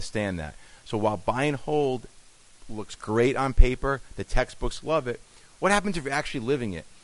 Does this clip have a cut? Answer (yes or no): no